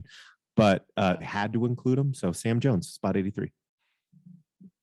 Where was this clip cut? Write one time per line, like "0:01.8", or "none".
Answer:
0:01.2